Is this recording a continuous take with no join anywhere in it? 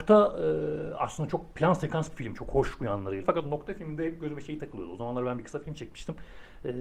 no; 1 cut; at 3.2 s

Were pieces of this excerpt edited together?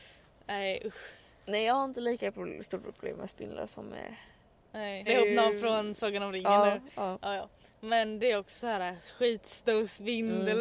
yes; 1 cut; at 5.1 s

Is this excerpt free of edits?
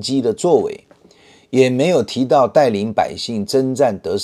yes; 0 cuts

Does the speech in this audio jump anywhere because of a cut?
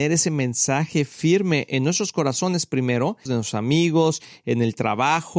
yes; 1 cut; at 3.3 s

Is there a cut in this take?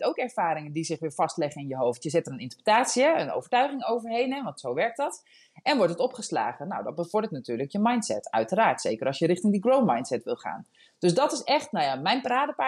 no; 0 cuts

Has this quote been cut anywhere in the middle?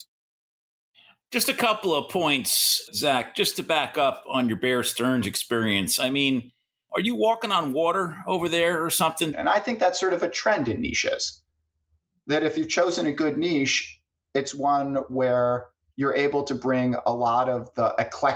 yes; 1 cut; at 9.3 s

